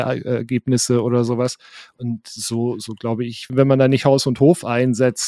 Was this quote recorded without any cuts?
no; 1 cut; at 3.5 s

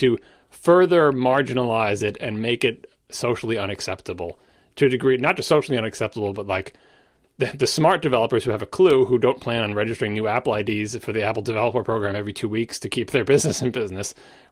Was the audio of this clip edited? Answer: no; 0 cuts

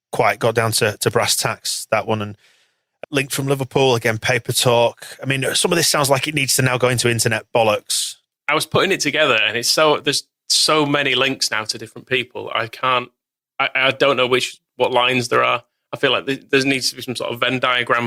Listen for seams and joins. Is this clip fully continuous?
no; 1 cut; at 3.0 s

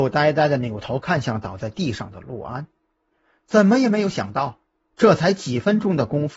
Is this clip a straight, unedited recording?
yes; 0 cuts

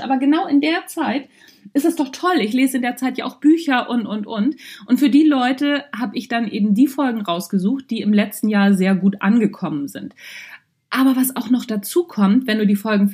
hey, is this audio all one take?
yes; 0 cuts

